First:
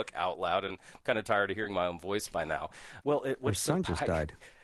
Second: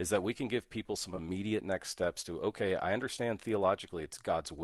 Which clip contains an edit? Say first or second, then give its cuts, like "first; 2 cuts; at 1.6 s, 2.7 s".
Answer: first; 1 cut; at 3.0 s